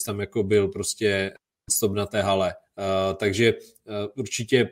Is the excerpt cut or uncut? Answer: cut